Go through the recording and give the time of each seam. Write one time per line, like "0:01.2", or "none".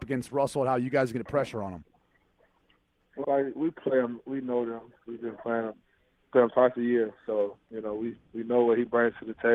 0:03.2